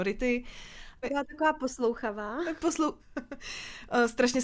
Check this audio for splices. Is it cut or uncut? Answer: cut